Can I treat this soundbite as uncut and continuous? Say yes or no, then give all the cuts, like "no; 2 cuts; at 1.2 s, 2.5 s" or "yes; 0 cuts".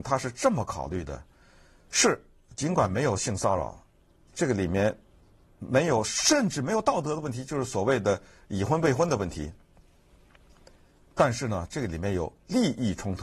yes; 0 cuts